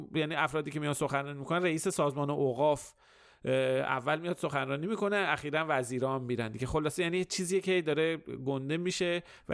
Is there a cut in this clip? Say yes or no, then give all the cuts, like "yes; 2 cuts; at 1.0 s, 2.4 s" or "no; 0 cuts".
no; 0 cuts